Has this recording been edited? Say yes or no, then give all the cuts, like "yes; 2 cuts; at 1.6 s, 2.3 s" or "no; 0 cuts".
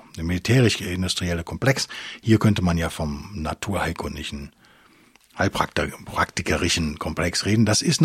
no; 0 cuts